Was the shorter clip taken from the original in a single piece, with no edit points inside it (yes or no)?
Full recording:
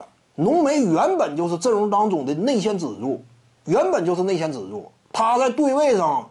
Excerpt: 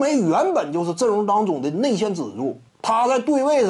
no